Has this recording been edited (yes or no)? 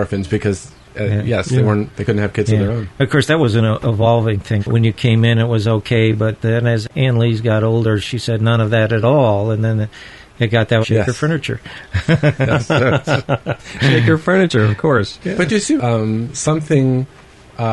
yes